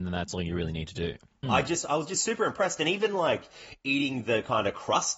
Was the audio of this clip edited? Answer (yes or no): yes